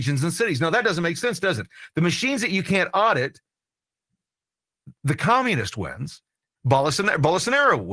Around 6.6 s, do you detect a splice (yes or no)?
yes